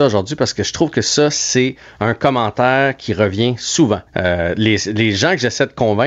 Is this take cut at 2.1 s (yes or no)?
no